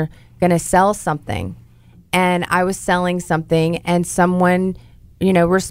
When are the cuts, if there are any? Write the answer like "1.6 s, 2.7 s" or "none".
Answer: none